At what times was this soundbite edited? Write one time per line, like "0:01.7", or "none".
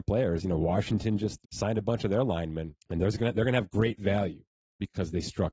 0:01.4
0:02.8